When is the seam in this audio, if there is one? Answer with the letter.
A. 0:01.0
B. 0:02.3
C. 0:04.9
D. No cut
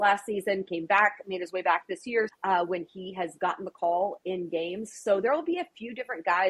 B